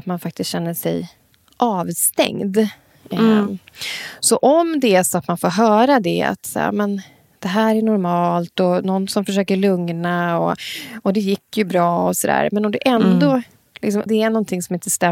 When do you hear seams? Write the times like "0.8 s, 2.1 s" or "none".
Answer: 14.1 s